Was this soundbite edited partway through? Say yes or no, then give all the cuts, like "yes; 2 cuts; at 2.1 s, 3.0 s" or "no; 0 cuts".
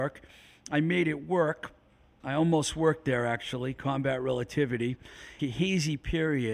yes; 2 cuts; at 2.2 s, 5.4 s